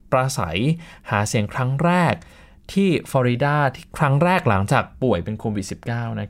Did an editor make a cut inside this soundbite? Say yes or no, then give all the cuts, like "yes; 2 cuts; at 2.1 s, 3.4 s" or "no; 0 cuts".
no; 0 cuts